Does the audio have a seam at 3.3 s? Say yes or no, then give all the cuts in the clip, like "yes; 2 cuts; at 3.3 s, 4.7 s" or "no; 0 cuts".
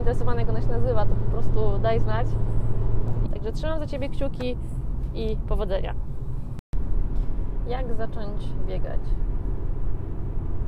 yes; 1 cut; at 3.3 s